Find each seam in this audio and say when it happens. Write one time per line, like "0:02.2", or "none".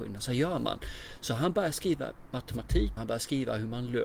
0:03.0